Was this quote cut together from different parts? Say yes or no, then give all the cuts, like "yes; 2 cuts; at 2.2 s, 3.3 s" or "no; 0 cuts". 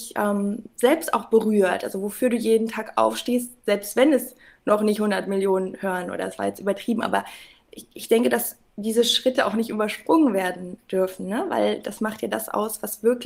no; 0 cuts